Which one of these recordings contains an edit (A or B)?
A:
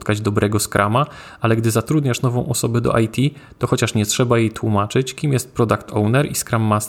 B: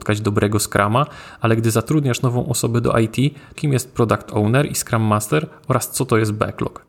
B